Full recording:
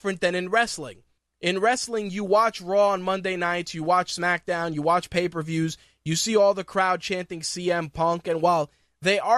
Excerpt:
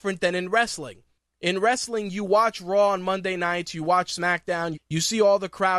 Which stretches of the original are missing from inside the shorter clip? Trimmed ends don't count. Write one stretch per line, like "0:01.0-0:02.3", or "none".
0:04.7-0:05.9

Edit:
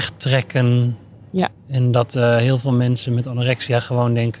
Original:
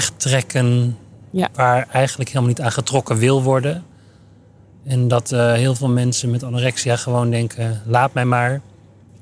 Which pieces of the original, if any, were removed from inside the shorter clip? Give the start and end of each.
0:01.5-0:04.7

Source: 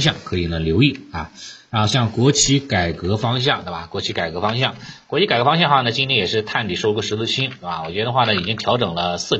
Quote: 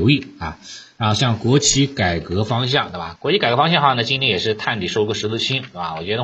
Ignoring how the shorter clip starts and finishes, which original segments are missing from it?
0:03.9-0:05.0

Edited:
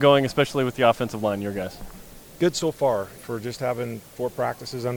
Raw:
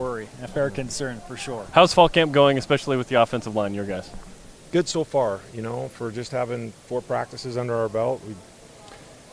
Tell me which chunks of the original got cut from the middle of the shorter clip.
0:05.5-0:05.9

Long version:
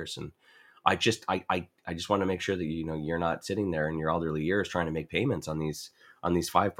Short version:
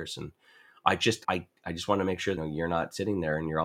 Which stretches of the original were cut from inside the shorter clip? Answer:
0:01.2-0:01.5
0:02.6-0:02.9

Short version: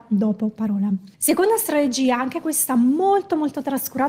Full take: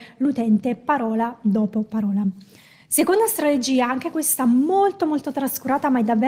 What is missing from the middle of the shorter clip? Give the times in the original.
0:02.5-0:02.8

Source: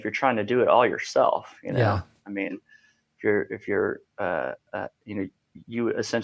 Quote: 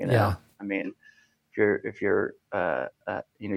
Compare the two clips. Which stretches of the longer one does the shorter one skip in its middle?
none

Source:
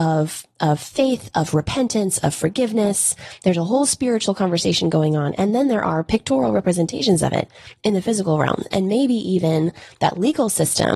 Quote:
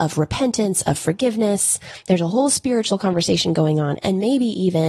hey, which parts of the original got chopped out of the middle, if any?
0:05.4-0:08.7

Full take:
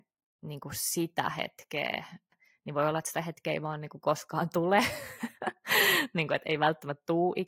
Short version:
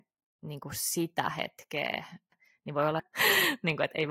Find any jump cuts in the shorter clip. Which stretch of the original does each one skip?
0:03.0-0:05.5

